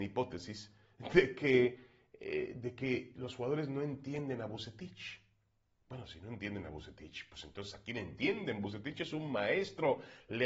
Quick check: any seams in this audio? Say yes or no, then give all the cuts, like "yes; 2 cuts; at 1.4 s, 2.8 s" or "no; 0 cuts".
no; 0 cuts